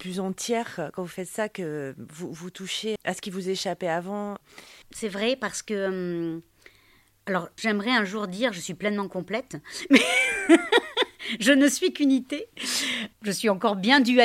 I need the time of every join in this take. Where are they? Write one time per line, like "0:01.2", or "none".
0:03.0
0:04.8
0:07.6